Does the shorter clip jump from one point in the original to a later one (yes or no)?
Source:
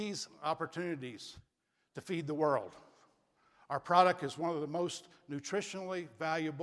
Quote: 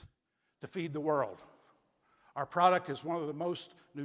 no